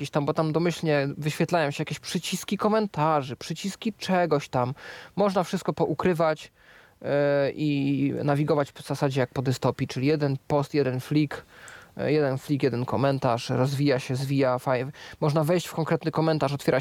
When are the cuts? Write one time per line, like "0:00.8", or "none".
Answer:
none